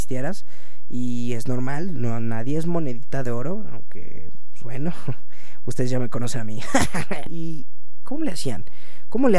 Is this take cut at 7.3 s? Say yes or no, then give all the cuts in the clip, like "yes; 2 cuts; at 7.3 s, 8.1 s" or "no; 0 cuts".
yes; 1 cut; at 7.3 s